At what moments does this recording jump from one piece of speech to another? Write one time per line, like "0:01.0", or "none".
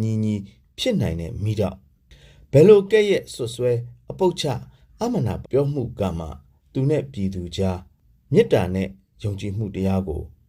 0:05.4